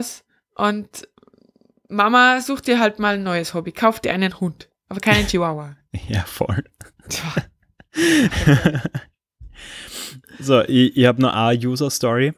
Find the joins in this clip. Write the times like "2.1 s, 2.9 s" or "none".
none